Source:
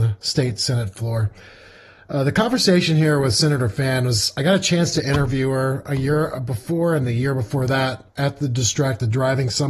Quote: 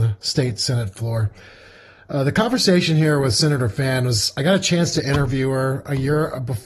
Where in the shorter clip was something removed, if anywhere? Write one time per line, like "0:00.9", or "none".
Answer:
none